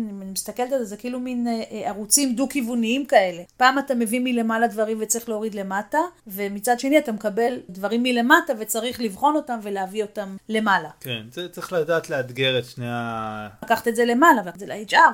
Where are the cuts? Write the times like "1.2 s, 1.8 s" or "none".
13.6 s